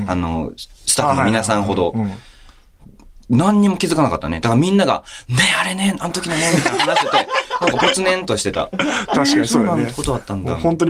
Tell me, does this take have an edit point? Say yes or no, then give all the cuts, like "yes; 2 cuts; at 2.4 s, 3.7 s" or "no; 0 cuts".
no; 0 cuts